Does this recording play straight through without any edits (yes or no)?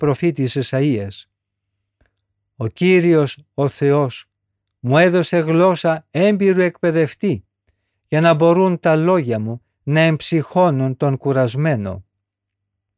yes